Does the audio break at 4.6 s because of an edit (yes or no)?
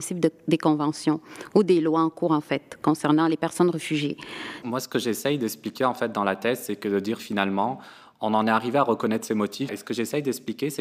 yes